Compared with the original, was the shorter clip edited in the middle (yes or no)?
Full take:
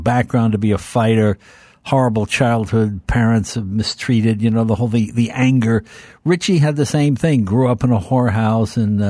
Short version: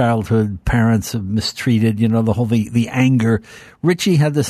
no